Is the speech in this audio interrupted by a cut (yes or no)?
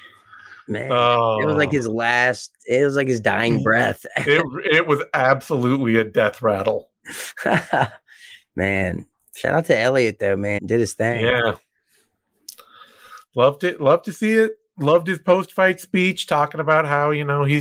yes